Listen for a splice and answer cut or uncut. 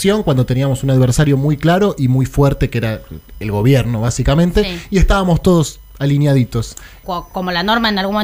cut